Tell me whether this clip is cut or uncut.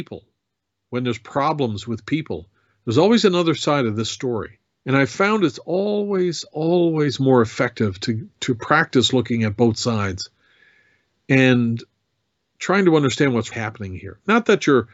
cut